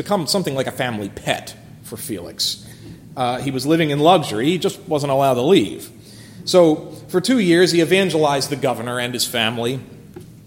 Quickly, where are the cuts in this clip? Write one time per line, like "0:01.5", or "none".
none